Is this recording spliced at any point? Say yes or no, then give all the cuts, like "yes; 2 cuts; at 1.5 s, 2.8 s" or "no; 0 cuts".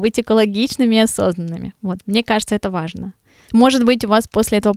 no; 0 cuts